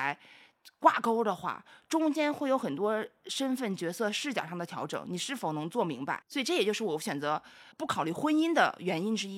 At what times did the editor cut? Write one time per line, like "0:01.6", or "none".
0:06.2
0:07.7